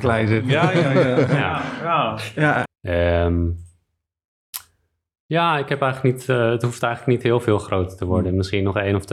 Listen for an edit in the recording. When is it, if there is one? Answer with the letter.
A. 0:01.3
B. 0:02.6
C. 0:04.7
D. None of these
B